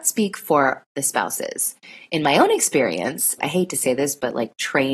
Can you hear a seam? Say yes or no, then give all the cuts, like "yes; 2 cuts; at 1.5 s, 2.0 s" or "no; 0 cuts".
yes; 1 cut; at 3.4 s